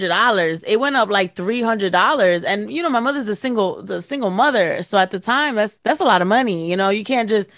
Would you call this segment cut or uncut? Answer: uncut